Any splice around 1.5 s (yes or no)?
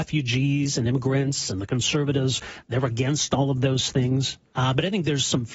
no